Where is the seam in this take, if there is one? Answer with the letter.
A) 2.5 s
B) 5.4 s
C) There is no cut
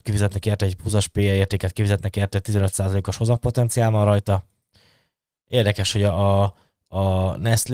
B